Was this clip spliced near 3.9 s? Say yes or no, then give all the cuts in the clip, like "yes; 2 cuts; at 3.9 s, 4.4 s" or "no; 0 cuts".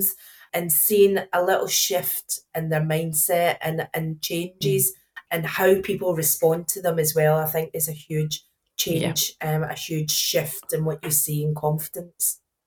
no; 0 cuts